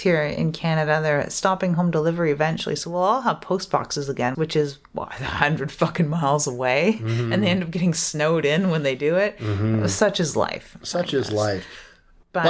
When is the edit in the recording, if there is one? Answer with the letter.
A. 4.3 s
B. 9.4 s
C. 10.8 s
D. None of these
A